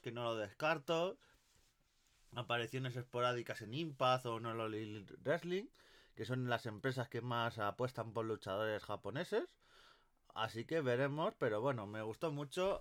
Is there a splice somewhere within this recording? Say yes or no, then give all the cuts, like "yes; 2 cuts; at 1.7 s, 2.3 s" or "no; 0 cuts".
no; 0 cuts